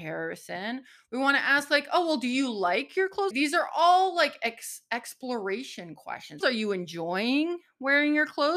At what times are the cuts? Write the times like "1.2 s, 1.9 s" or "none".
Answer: 3.3 s, 6.4 s